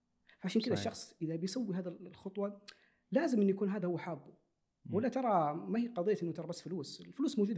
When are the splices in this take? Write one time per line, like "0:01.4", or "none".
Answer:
none